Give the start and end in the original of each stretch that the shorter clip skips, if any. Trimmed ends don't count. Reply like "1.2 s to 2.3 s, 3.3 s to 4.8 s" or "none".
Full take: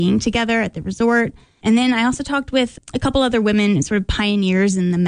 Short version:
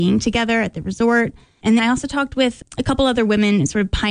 1.8 s to 1.9 s